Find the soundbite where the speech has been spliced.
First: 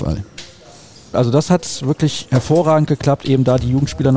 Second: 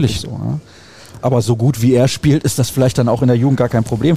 first; 1 cut; at 1.1 s

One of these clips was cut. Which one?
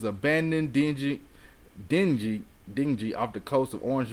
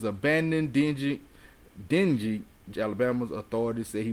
second; 1 cut; at 2.7 s

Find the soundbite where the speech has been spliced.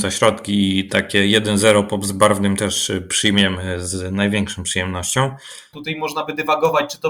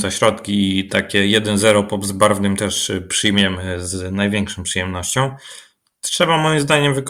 first; 1 cut; at 5.7 s

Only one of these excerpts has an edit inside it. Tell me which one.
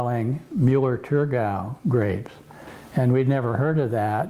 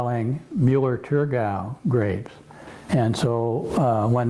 second; 1 cut; at 2.9 s

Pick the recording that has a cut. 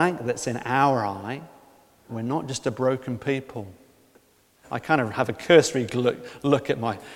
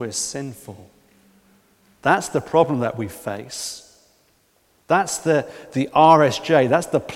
first; 2 cuts; at 2.1 s, 4.6 s

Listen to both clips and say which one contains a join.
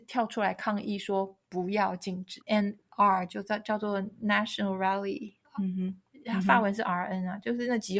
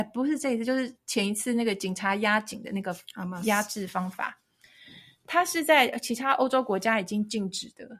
first; 1 cut; at 2.4 s

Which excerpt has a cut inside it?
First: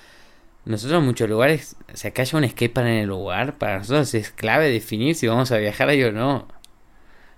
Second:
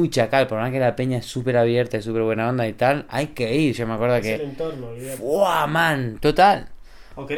second; 1 cut; at 6.2 s

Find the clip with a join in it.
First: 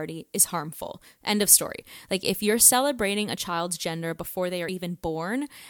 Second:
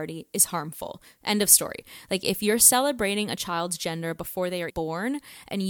second; 1 cut; at 4.7 s

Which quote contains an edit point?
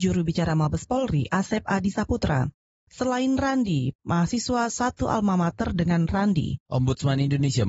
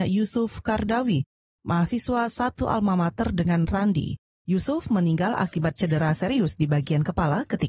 first; 3 cuts; at 2.7 s, 3.9 s, 6.7 s

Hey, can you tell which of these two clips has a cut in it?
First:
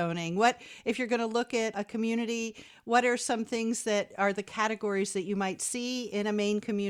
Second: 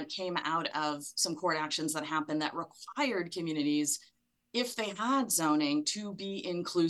first; 1 cut; at 1.7 s

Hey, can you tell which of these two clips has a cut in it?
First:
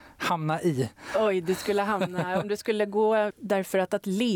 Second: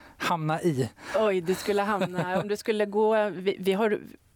first; 1 cut; at 3.3 s

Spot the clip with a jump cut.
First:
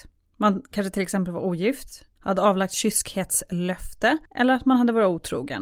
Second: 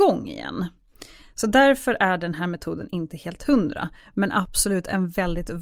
first; 2 cuts; at 2.2 s, 4.3 s

